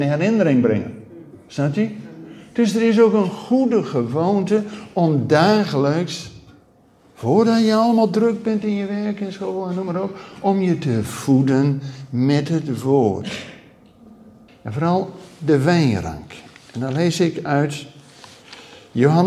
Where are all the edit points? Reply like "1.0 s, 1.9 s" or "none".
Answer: 14.5 s